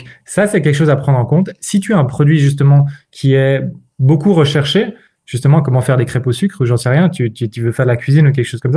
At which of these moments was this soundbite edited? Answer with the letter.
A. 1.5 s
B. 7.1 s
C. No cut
C